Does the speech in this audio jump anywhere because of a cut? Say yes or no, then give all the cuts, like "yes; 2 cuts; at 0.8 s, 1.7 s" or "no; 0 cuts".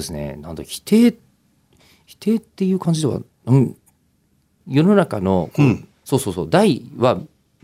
yes; 1 cut; at 4.6 s